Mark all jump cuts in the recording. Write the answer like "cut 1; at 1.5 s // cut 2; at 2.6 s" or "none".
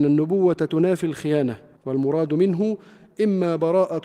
cut 1; at 1.8 s